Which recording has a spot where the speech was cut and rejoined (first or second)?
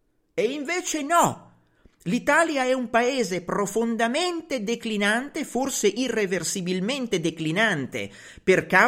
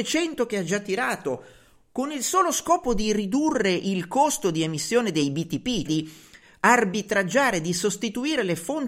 second